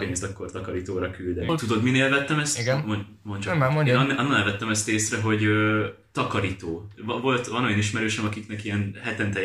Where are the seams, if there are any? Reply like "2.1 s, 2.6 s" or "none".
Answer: 1.5 s